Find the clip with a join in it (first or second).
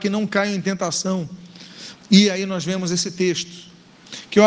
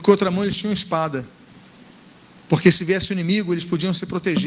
first